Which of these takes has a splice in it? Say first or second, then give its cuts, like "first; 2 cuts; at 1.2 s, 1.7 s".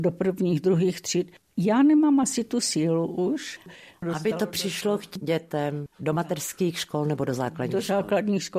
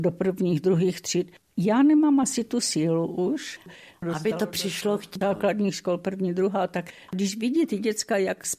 second; 1 cut; at 5.2 s